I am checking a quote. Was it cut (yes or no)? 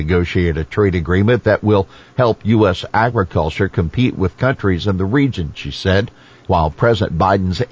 yes